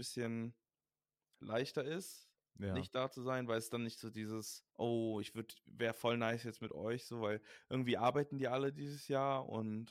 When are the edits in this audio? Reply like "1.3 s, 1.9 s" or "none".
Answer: 4.7 s